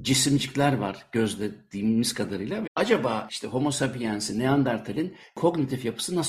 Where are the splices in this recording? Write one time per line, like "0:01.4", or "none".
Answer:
0:02.6